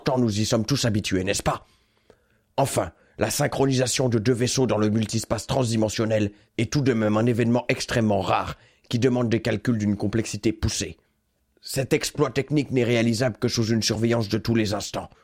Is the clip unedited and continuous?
yes; 0 cuts

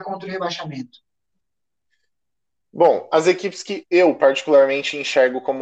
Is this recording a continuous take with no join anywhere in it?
yes; 0 cuts

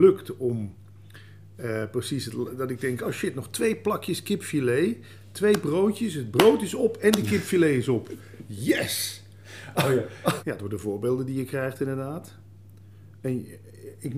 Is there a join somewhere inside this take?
yes; 1 cut; at 10.4 s

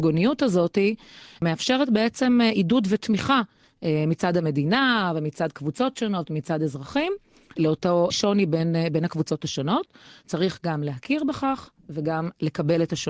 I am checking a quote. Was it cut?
no; 0 cuts

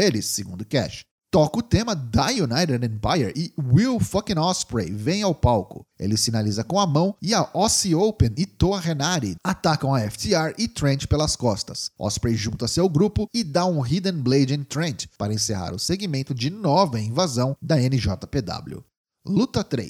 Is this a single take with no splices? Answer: no; 1 cut; at 9.4 s

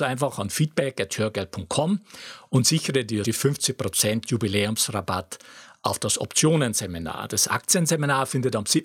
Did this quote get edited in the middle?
yes; 1 cut; at 3.2 s

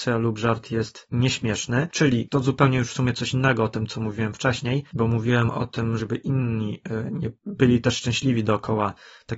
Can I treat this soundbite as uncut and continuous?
no; 1 cut; at 6.0 s

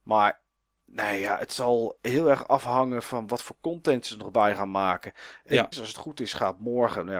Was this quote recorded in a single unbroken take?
no; 1 cut; at 5.7 s

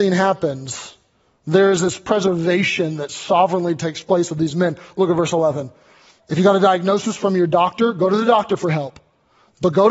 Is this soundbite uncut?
no; 1 cut; at 6.2 s

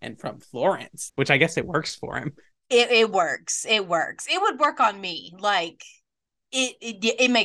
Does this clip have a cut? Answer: yes; 1 cut; at 1.1 s

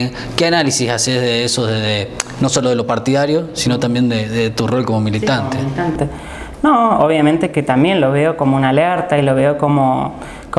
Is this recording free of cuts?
yes; 0 cuts

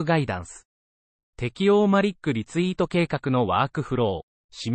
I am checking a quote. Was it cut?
yes; 1 cut; at 1.2 s

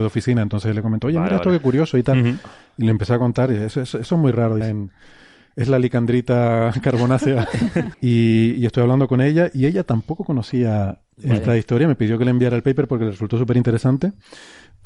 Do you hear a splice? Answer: yes; 2 cuts; at 4.6 s, 7.9 s

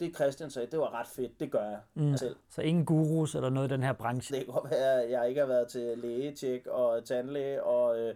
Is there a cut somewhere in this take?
yes; 2 cuts; at 2.2 s, 4.3 s

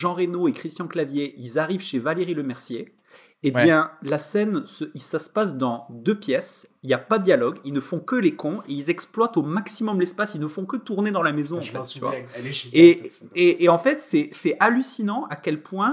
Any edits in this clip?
yes; 1 cut; at 6.7 s

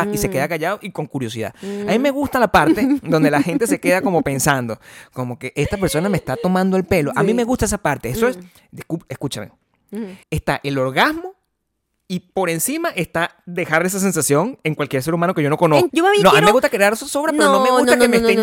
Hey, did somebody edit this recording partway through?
yes; 2 cuts; at 10.2 s, 15.9 s

